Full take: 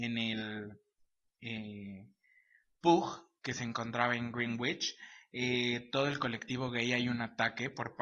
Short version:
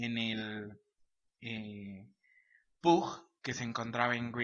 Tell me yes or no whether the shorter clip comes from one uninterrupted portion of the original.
yes